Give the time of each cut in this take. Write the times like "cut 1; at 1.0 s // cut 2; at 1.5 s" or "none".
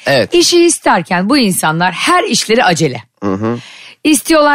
none